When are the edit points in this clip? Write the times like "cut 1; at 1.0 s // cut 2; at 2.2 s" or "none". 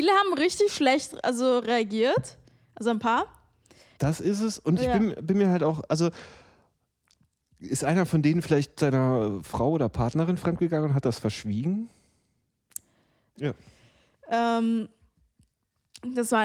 cut 1; at 4.0 s // cut 2; at 13.4 s